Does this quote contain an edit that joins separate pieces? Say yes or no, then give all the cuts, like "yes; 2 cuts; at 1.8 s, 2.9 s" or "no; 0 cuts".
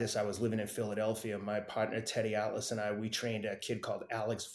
no; 0 cuts